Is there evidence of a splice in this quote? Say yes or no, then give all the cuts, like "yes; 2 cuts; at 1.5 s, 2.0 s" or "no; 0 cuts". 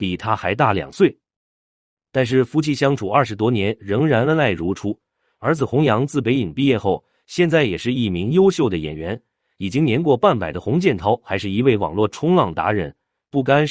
no; 0 cuts